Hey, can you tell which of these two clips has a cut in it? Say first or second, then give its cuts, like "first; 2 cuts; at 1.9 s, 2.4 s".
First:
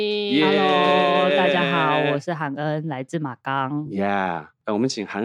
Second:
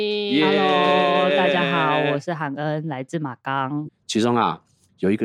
second; 1 cut; at 3.9 s